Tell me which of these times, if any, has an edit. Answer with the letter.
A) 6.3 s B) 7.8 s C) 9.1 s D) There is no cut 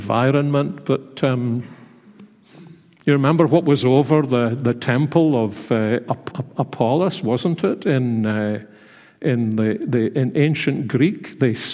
A